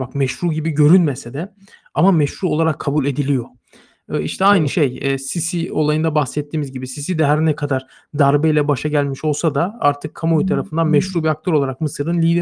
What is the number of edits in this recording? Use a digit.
0